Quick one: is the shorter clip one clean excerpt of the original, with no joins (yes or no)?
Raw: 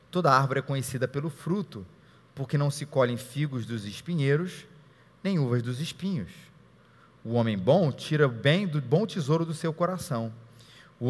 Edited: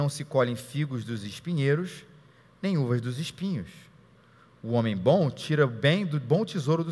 yes